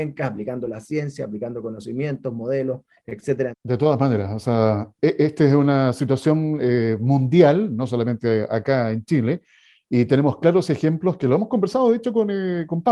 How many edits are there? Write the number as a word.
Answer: one